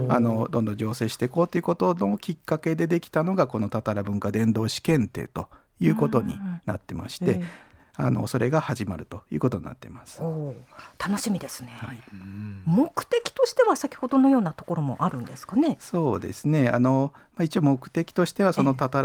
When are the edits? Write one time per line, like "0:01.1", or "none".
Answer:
none

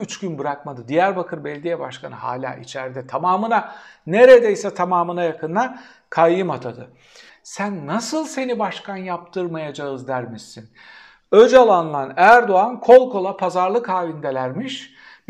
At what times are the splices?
0:07.3

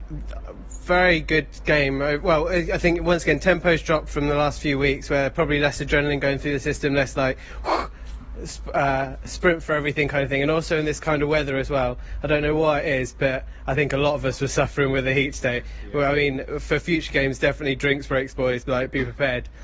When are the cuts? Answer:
none

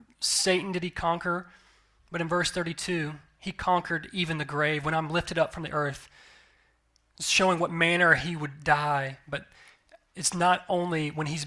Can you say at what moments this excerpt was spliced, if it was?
none

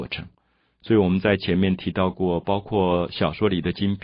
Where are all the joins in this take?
none

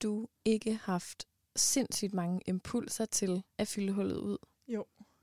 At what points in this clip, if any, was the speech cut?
0:03.5

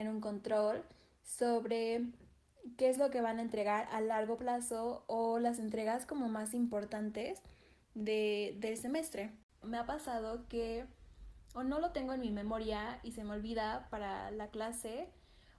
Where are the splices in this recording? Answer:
0:09.6

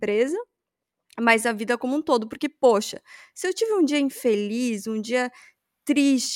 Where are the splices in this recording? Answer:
none

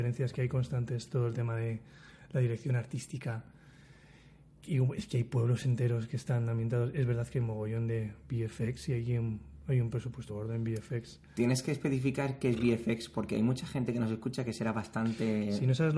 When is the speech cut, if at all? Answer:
0:10.3

